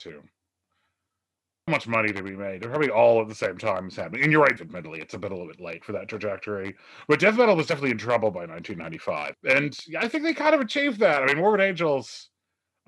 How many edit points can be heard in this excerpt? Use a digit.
3